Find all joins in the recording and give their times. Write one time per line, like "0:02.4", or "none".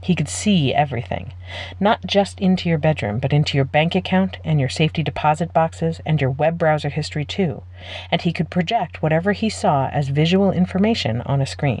none